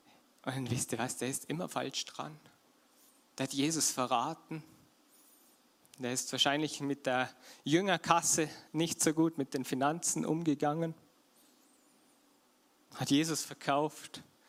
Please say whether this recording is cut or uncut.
uncut